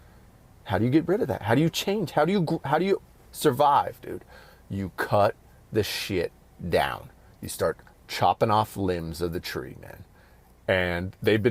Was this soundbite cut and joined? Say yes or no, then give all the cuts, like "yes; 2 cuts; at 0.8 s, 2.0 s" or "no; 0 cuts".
no; 0 cuts